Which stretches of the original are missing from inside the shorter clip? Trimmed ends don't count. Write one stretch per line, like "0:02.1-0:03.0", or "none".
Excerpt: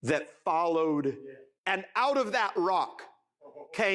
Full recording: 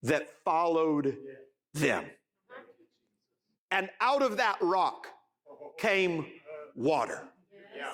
0:01.6-0:03.6

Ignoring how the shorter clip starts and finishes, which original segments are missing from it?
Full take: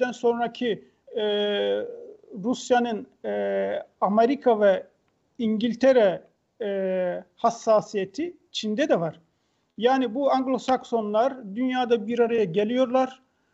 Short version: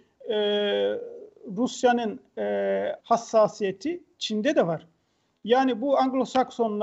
0:03.9-0:07.3

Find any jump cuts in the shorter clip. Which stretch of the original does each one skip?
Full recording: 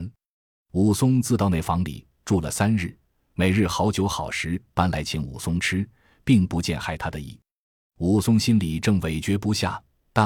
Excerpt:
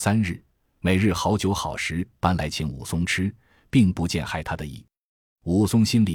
none

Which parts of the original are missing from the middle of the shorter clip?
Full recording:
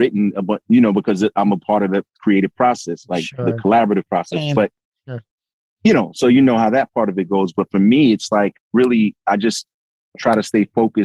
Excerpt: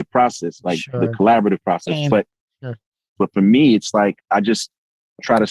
0:05.6-0:07.5
0:08.6-0:09.2

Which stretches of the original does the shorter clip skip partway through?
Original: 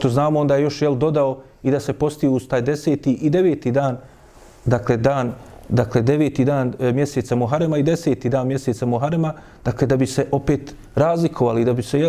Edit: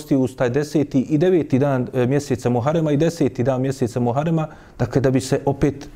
0:03.6-0:06.4

